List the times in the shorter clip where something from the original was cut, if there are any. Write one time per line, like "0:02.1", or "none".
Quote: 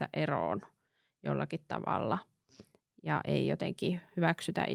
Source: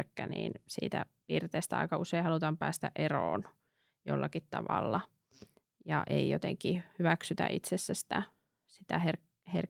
none